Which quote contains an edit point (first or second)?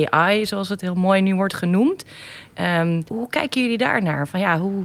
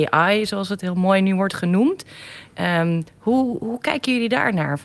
first